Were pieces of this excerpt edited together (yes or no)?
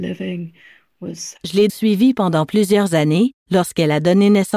yes